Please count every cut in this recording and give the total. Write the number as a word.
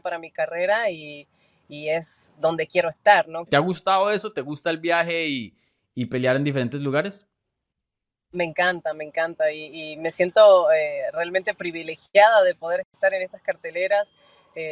one